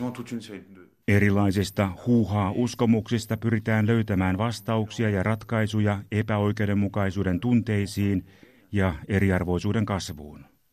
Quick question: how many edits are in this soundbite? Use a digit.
1